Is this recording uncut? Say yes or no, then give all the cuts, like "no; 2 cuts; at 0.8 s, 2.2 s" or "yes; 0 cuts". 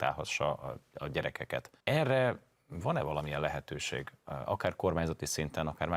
no; 1 cut; at 1.8 s